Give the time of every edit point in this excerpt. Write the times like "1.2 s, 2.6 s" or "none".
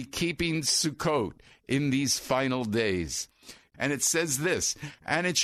3.7 s